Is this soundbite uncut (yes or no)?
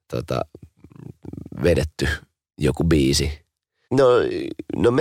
no